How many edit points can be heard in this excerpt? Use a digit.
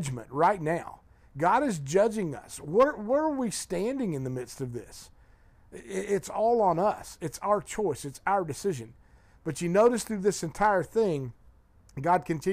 1